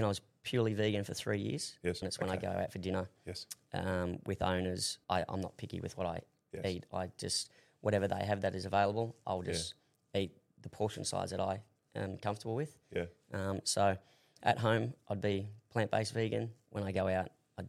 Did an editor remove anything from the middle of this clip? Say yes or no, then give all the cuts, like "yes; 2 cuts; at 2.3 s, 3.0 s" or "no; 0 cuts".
yes; 2 cuts; at 2.0 s, 5.0 s